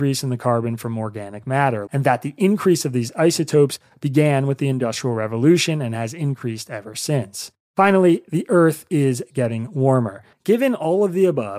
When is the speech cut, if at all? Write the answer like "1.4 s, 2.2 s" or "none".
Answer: 1.9 s, 10.3 s